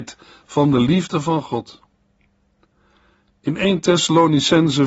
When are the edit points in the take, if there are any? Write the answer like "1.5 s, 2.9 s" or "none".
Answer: none